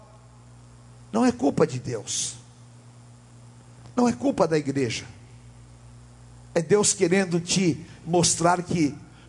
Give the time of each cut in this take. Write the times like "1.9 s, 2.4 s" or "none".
6.5 s